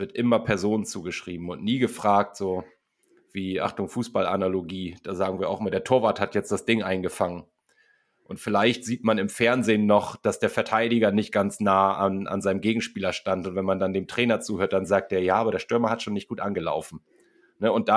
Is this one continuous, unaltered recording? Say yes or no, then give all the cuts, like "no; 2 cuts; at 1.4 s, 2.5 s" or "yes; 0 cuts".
yes; 0 cuts